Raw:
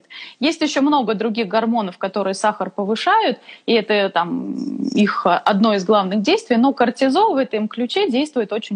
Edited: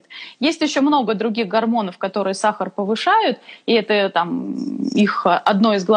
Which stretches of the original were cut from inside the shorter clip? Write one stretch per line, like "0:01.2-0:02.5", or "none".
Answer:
none